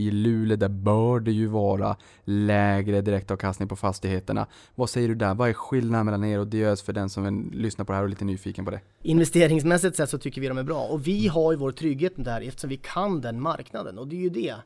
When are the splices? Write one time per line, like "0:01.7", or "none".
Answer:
0:09.0